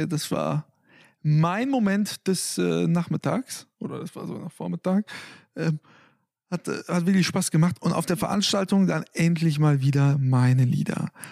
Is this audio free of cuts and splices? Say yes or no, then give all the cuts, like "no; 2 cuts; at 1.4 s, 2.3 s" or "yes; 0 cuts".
yes; 0 cuts